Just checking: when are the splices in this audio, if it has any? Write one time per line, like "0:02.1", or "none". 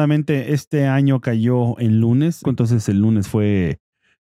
0:02.4